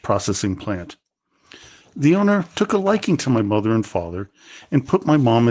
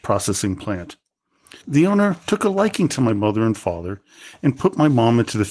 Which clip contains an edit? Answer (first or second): second